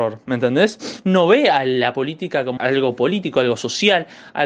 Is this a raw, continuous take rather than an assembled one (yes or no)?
no